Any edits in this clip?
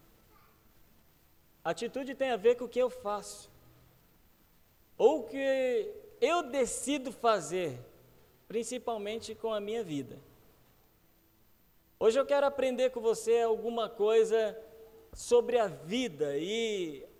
no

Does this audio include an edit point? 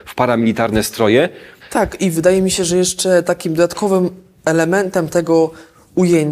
yes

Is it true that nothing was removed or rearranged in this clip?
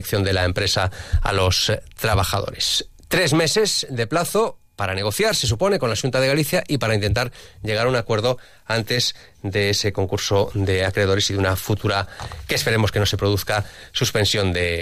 no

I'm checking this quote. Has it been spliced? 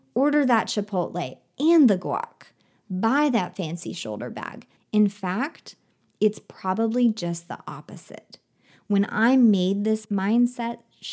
yes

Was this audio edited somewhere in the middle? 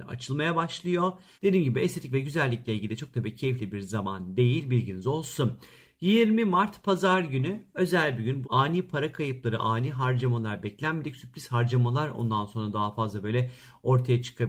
yes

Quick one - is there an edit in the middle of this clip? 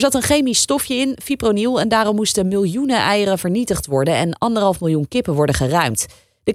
no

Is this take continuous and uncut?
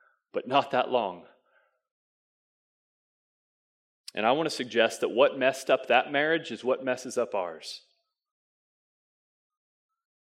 yes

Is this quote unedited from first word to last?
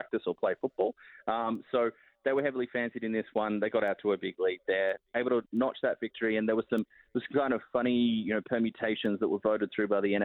yes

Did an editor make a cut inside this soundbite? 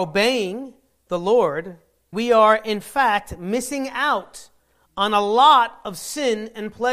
yes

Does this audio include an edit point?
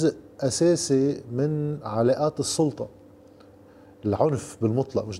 no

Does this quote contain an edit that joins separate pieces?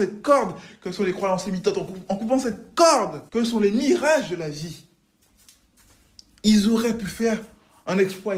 yes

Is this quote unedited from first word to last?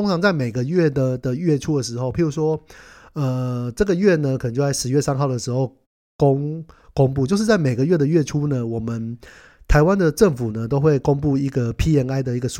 yes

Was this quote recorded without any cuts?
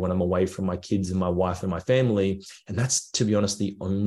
yes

